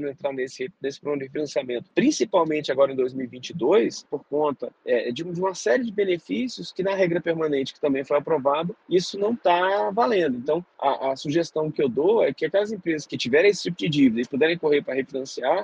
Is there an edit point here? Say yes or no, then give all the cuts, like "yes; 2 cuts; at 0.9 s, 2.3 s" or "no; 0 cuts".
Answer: yes; 1 cut; at 4.0 s